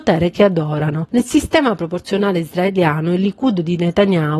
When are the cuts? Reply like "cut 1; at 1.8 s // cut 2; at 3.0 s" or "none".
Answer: none